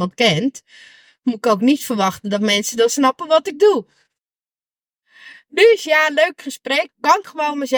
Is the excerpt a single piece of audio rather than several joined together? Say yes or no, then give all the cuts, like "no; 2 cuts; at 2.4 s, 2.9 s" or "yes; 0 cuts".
no; 1 cut; at 6.9 s